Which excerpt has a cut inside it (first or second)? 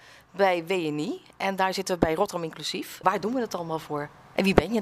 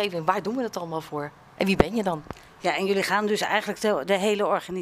first